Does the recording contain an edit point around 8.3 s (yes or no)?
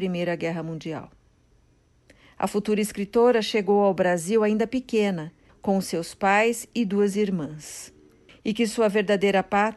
yes